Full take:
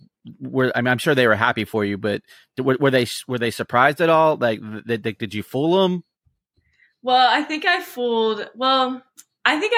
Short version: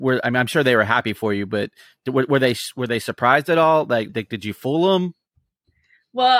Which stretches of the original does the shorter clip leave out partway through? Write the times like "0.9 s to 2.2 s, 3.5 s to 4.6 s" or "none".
4.6 s to 5.0 s